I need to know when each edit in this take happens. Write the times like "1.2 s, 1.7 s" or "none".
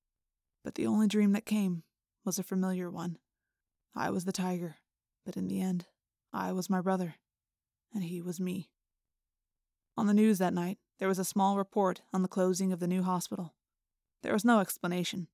5.1 s

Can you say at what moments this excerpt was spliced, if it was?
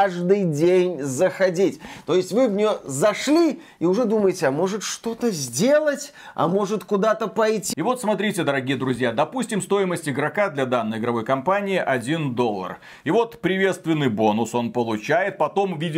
7.7 s

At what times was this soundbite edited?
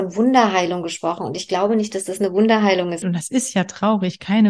3.0 s

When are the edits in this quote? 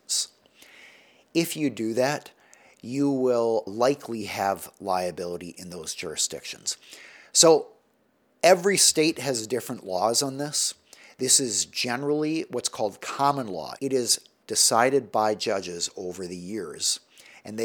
13.8 s

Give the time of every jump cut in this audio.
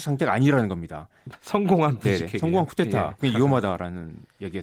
1.3 s, 3.2 s

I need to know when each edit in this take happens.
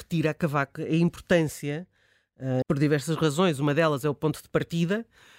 2.6 s

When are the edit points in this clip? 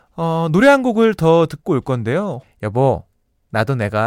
2.4 s

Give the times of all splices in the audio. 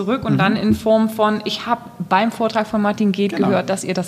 none

